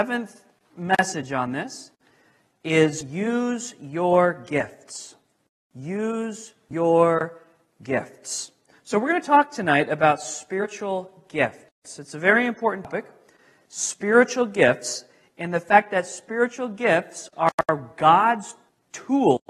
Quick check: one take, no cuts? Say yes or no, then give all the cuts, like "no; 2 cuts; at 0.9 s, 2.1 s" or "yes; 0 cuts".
yes; 0 cuts